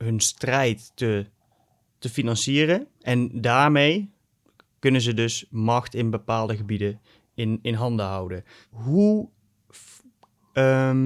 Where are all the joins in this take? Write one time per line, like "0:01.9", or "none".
none